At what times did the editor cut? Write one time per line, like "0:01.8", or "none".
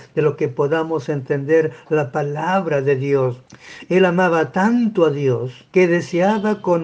0:05.7